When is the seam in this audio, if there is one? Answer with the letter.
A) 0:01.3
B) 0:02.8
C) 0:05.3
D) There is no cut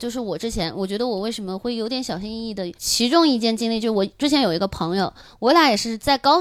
B